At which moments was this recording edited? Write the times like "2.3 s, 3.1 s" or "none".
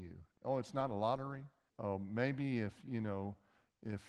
1.7 s